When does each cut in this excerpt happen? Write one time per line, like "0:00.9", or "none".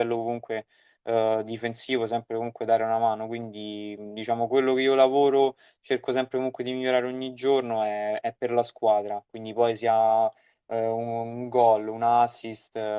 none